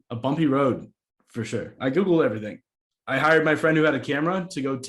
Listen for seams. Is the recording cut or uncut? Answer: cut